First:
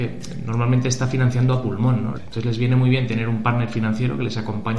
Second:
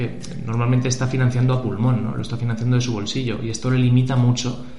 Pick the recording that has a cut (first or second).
first